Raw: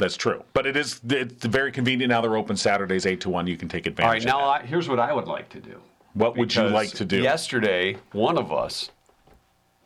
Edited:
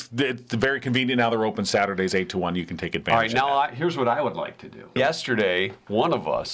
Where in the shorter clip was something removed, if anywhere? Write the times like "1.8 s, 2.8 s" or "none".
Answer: 5.0 s